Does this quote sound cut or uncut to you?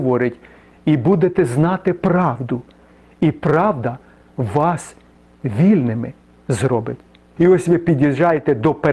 cut